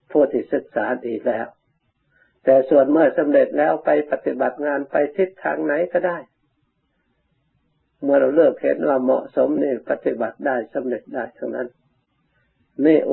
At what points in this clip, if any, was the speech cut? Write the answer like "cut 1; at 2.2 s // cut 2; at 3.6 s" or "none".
cut 1; at 9.6 s